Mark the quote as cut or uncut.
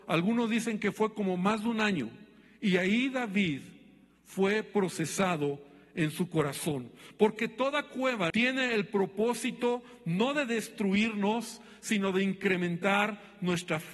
cut